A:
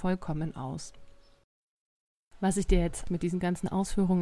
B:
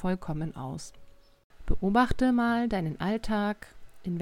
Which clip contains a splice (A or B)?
B